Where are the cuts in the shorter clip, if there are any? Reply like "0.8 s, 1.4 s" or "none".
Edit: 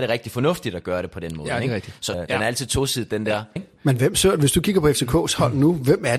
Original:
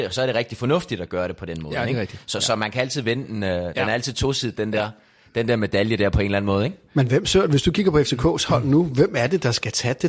2.1 s, 3.6 s